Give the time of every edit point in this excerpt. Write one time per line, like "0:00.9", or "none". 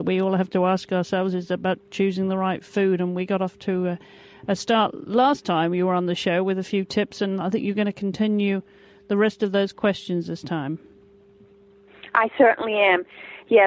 none